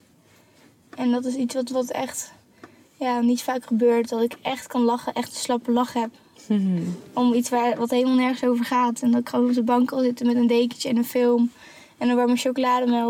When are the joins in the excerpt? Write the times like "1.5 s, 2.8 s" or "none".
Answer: none